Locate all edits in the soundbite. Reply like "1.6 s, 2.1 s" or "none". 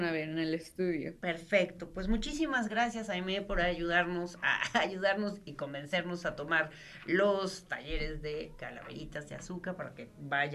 1.2 s